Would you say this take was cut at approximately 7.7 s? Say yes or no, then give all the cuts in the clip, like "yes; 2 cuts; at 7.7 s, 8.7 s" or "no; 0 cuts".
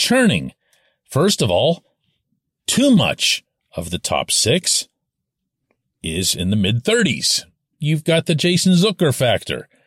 yes; 1 cut; at 7.7 s